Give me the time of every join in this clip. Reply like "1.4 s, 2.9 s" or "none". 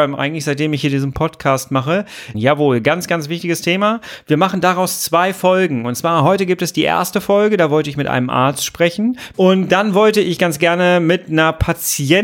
2.3 s, 9.3 s